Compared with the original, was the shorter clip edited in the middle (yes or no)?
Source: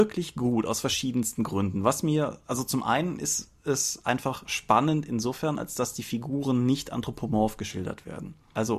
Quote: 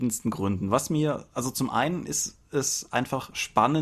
no